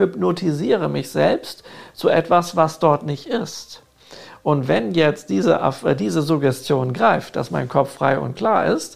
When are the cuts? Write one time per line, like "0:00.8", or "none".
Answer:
none